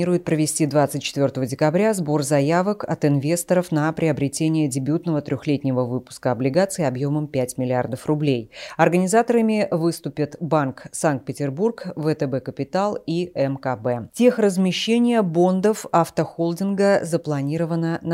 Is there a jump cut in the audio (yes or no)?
no